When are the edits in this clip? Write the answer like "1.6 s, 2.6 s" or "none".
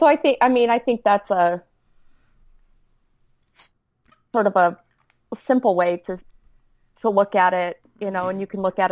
none